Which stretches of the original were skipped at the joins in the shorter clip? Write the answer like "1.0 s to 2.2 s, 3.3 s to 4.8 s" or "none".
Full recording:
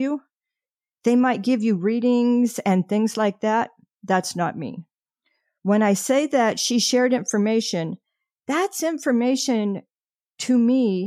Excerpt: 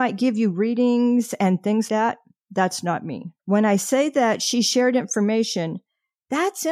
3.1 s to 3.4 s, 4.9 s to 5.6 s